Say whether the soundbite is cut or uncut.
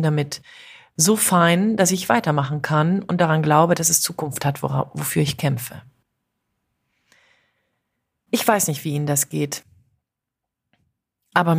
uncut